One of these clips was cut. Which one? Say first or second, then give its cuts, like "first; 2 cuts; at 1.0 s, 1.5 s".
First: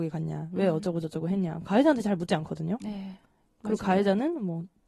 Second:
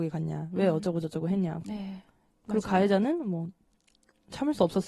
second; 1 cut; at 1.6 s